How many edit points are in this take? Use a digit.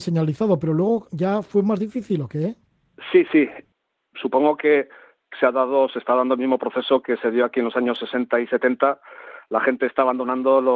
1